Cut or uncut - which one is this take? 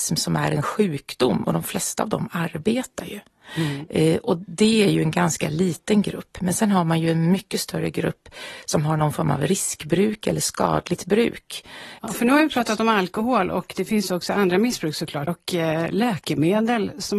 cut